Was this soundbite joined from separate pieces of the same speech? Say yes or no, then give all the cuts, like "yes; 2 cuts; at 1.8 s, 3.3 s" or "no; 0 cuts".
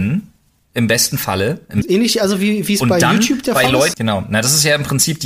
yes; 2 cuts; at 1.8 s, 3.9 s